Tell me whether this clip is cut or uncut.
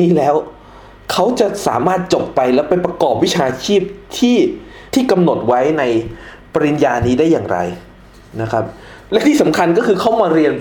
cut